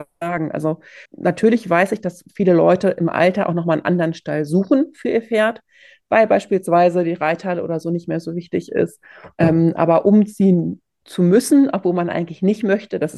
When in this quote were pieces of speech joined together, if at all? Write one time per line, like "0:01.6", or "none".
0:01.1